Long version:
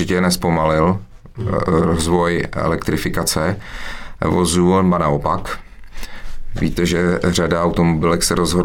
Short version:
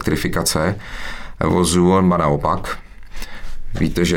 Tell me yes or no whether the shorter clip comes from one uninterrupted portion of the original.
yes